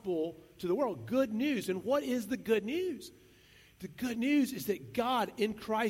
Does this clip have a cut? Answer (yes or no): no